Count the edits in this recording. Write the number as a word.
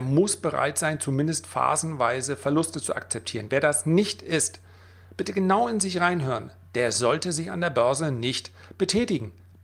zero